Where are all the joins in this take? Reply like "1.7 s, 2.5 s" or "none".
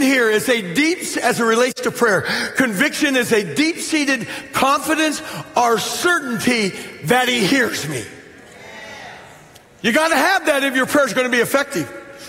none